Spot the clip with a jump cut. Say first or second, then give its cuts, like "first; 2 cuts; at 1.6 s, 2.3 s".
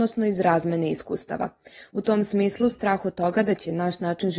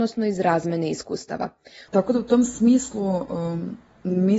second; 1 cut; at 1.9 s